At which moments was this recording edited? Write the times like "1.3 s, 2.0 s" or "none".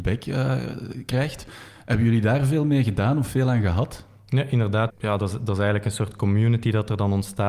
4.9 s